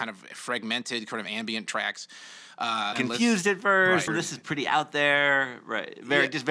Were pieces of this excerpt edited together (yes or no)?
yes